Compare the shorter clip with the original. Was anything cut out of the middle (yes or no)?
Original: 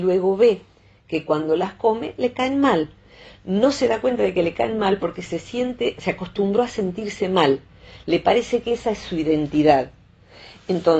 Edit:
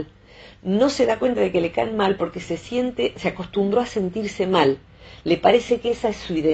no